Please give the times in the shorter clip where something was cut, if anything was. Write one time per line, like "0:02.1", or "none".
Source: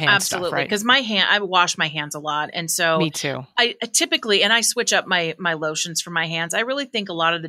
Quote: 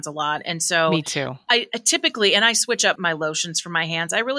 0:03.0